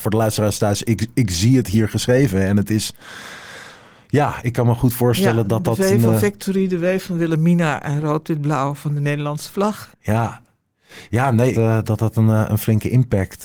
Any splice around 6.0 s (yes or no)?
no